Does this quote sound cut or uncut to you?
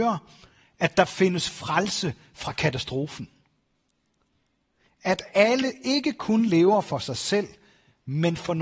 uncut